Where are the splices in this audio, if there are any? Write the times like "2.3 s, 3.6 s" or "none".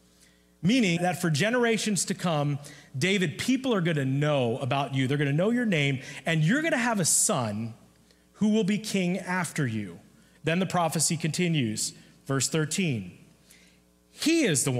1.0 s, 10.4 s